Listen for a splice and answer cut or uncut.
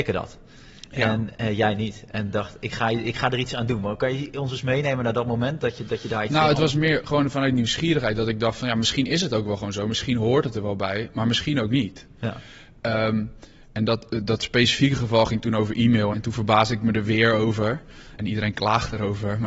cut